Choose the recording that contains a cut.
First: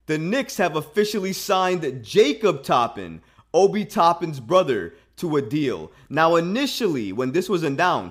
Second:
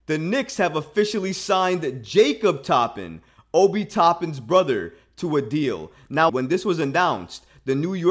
second; 1 cut; at 6.3 s

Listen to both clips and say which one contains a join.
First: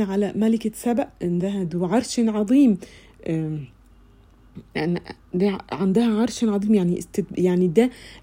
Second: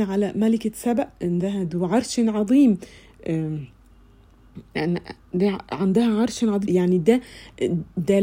second; 1 cut; at 6.7 s

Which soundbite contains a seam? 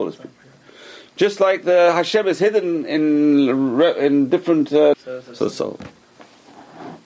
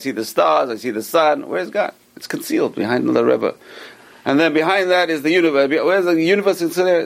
first; 1 cut; at 4.9 s

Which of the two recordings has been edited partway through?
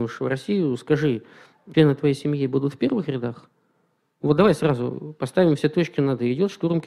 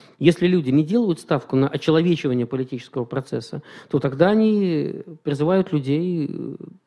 first; 1 cut; at 1.7 s

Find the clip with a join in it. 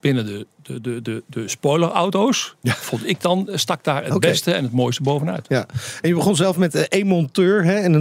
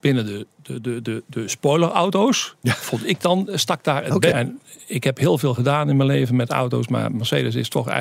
second; 1 cut; at 4.3 s

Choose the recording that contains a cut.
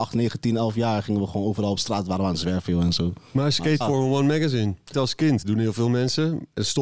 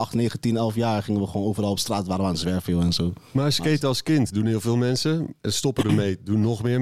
first; 2 cuts; at 3.8 s, 4.9 s

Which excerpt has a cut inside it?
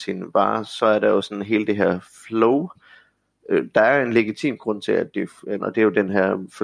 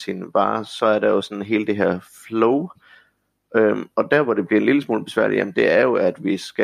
first; 2 cuts; at 3.4 s, 5.6 s

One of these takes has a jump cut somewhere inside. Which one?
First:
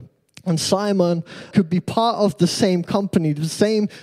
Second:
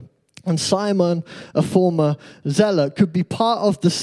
first; 1 cut; at 1.5 s

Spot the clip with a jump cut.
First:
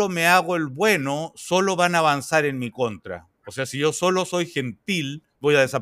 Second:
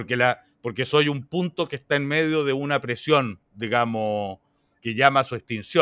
second; 1 cut; at 4.8 s

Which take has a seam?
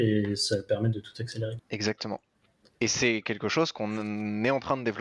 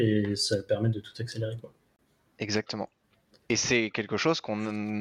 first; 1 cut; at 1.6 s

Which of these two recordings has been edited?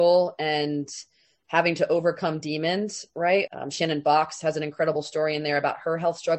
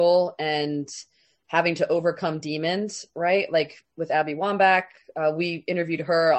first; 1 cut; at 3.5 s

